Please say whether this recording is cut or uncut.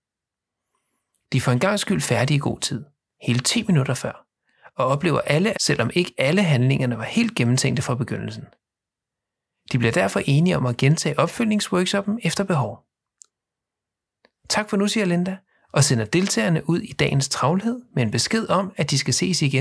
cut